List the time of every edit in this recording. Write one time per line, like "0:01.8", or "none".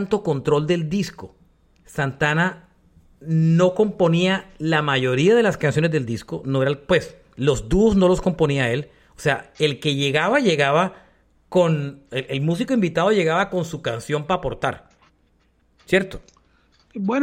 none